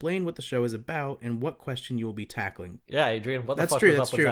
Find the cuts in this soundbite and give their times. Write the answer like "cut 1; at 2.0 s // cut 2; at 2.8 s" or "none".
cut 1; at 2.8 s

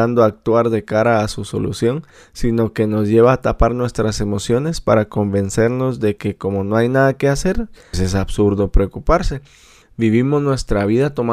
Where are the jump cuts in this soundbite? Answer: cut 1; at 7.9 s // cut 2; at 9.8 s

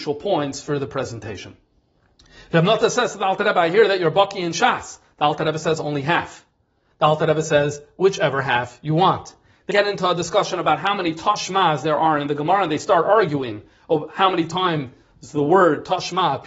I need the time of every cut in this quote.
cut 1; at 6.9 s // cut 2; at 9.7 s

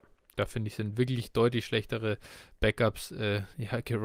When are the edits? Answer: none

